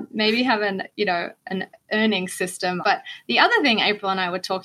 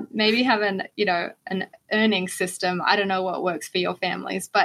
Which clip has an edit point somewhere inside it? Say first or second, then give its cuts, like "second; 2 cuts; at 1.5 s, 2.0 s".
first; 1 cut; at 2.8 s